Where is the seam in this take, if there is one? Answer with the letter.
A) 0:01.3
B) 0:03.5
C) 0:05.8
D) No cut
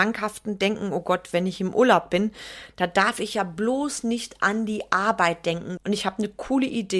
C